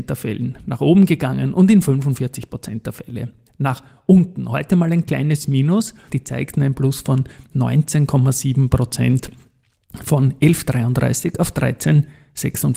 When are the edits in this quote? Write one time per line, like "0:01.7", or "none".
0:06.1